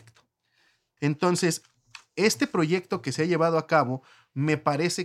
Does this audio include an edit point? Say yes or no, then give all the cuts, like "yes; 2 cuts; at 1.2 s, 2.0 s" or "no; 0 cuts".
yes; 1 cut; at 1.0 s